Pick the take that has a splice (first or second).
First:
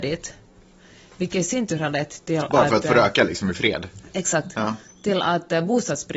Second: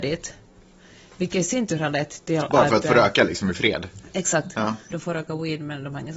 second